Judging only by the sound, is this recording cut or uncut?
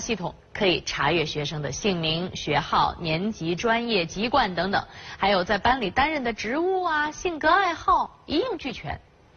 uncut